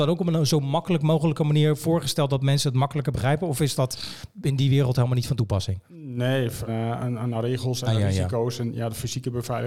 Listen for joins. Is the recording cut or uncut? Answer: cut